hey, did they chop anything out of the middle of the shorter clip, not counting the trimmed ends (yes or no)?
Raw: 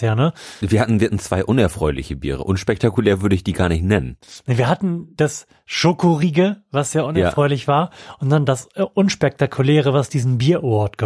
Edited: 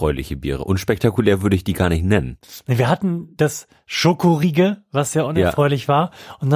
no